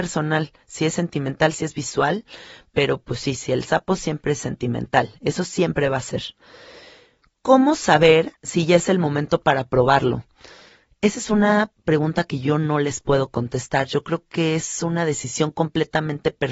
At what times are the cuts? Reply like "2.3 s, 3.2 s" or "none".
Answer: none

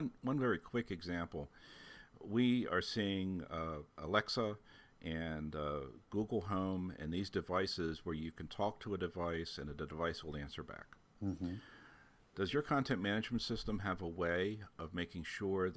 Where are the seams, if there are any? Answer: none

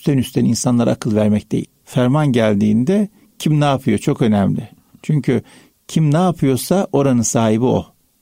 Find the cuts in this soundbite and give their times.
1.6 s

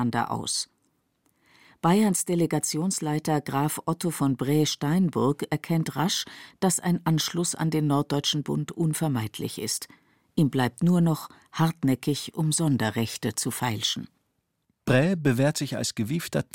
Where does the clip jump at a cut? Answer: none

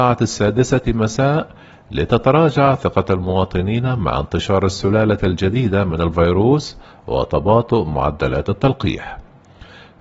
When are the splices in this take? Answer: none

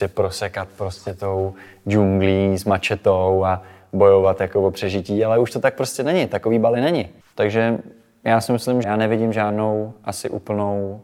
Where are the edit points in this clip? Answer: 7.2 s, 8.8 s

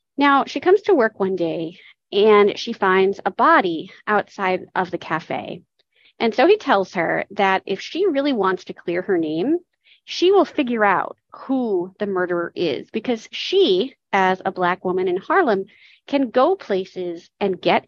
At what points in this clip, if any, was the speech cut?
6.0 s

